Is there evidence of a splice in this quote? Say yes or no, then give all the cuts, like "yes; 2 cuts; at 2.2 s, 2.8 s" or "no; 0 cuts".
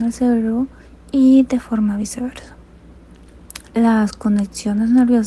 yes; 1 cut; at 3.7 s